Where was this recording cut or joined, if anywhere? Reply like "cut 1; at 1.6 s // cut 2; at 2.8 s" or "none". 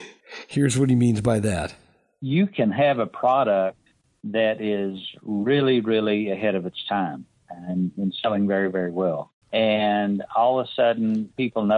cut 1; at 9.4 s